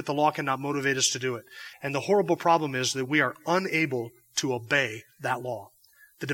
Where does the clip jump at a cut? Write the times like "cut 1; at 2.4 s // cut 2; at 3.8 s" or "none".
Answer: cut 1; at 1.7 s